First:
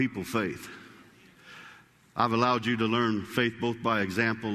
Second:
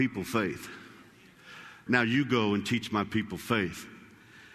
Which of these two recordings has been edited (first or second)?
second